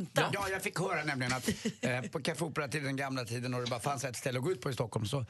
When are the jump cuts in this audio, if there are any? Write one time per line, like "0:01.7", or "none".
none